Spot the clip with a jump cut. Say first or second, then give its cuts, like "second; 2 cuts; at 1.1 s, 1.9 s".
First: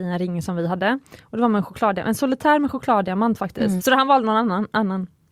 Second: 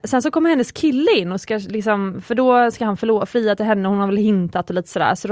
first; 1 cut; at 3.8 s